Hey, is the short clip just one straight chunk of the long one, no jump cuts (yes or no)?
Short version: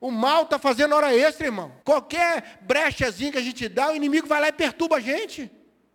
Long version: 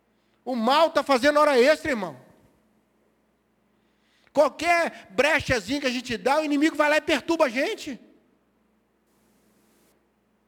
no